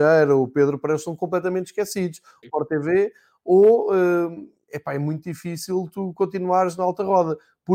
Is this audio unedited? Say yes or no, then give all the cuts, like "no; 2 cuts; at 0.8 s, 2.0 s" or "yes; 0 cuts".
no; 1 cut; at 2.4 s